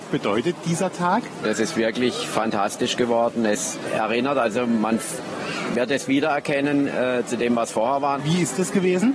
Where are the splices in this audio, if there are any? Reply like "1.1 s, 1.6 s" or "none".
8.2 s